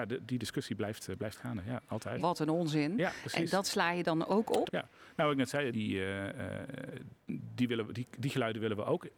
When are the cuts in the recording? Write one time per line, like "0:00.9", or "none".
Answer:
0:02.2
0:04.7
0:05.7

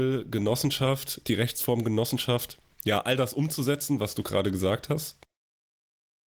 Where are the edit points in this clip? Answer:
none

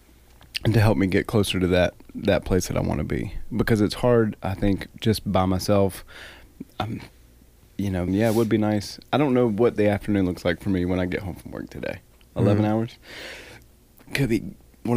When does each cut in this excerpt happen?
0:08.1
0:12.3

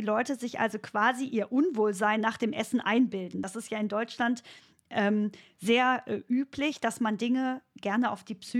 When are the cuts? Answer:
none

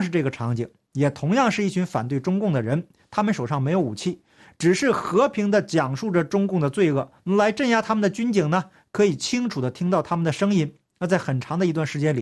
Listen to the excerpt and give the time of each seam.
0:07.2

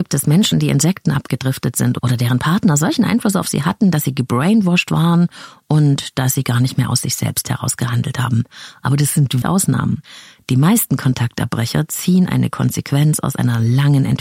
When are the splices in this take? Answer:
0:09.4

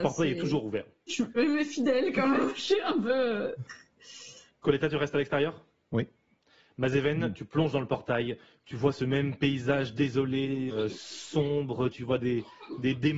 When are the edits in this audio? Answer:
0:01.1
0:10.7
0:11.9

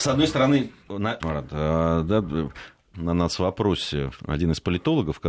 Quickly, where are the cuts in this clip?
0:01.2
0:02.9

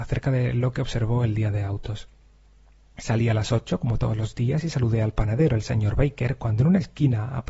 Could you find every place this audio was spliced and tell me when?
none

